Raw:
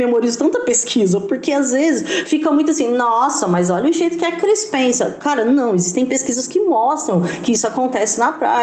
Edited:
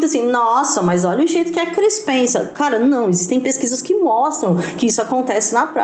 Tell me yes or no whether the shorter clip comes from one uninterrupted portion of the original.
yes